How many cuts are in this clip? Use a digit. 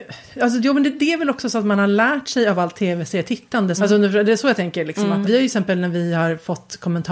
2